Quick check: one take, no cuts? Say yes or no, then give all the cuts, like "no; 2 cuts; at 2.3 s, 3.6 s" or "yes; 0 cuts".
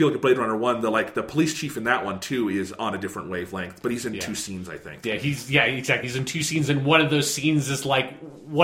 yes; 0 cuts